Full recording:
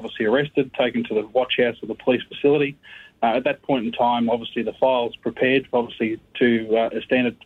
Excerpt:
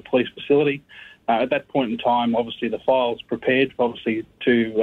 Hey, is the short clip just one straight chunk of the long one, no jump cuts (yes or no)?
yes